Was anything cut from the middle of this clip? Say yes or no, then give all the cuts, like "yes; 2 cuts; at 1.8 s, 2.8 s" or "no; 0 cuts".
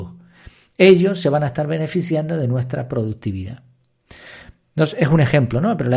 no; 0 cuts